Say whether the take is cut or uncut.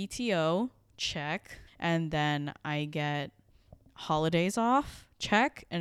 cut